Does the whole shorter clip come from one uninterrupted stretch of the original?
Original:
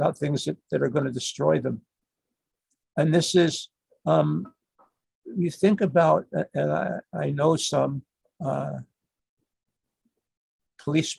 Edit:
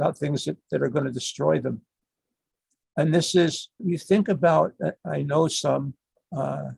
no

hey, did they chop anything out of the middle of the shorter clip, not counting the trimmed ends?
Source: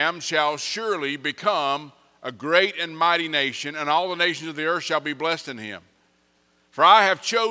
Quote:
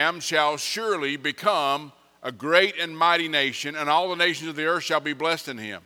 no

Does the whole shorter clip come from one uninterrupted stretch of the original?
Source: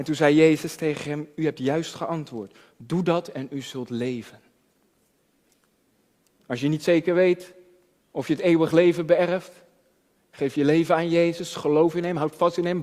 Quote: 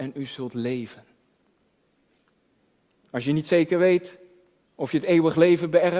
yes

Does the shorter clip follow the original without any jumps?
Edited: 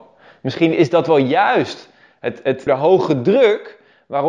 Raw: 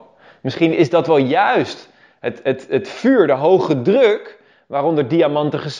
no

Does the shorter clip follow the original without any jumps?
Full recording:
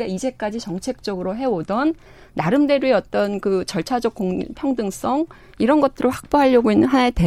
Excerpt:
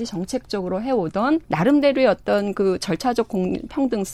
no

